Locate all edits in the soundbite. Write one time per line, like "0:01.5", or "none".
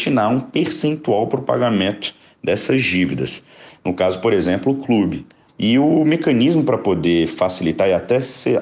0:03.7
0:05.5